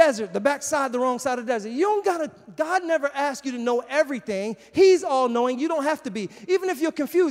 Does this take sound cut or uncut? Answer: uncut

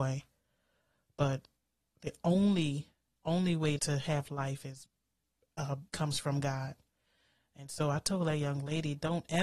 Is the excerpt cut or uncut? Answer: cut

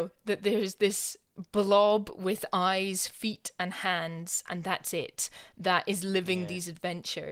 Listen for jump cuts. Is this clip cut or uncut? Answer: uncut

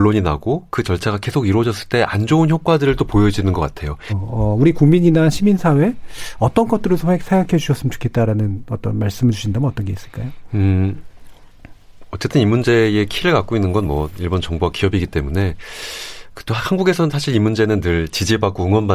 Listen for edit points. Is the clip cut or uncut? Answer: cut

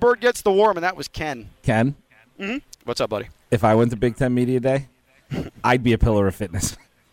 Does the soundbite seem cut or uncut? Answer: cut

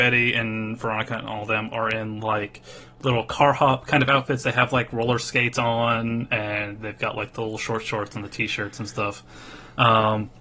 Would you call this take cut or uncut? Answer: uncut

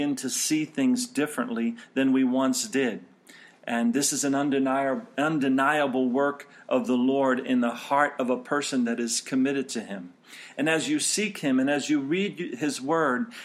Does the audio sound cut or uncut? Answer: uncut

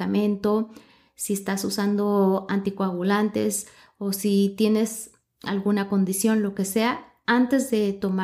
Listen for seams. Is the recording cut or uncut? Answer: uncut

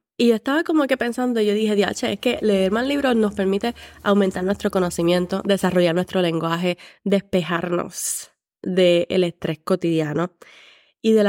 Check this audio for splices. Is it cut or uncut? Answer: uncut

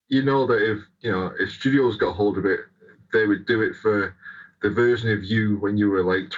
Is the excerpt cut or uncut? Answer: uncut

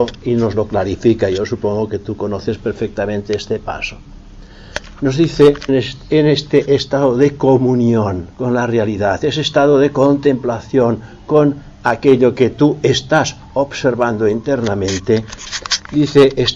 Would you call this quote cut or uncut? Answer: cut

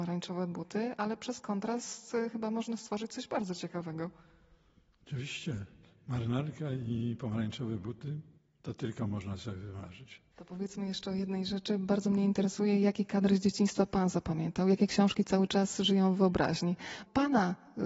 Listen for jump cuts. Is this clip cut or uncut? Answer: uncut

